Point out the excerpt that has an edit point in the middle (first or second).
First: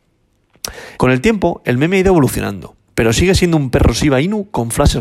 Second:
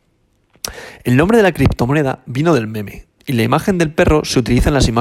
first